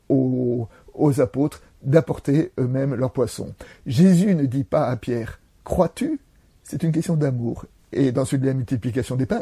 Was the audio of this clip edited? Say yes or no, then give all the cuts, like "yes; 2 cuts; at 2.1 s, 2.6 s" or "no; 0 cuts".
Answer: yes; 2 cuts; at 3.8 s, 7.8 s